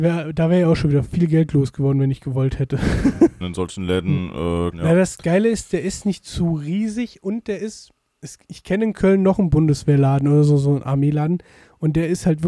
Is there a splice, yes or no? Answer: yes